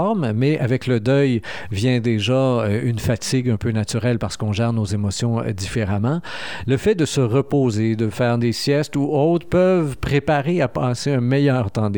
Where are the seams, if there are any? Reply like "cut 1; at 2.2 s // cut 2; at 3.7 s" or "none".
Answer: none